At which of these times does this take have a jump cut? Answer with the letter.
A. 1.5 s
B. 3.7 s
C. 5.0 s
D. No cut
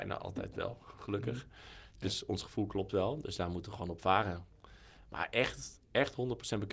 D